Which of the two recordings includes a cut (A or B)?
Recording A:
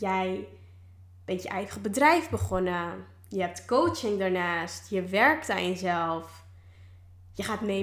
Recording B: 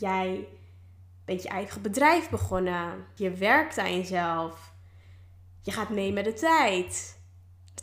B